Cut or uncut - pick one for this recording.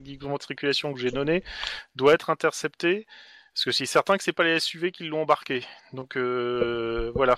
uncut